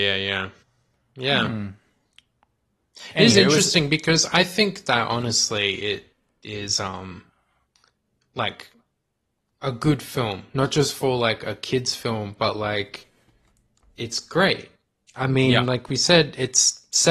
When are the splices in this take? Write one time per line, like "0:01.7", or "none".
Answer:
none